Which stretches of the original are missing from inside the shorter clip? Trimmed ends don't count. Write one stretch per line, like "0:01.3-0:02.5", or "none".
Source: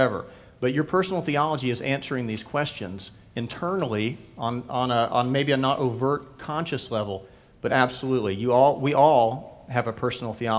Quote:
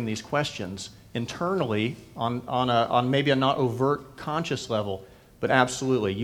none